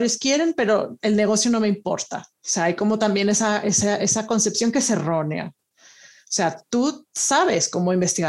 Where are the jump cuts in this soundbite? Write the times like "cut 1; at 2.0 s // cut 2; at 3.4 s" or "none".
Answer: none